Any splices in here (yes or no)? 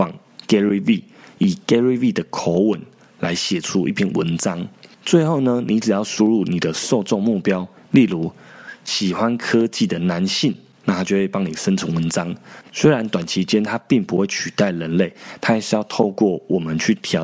yes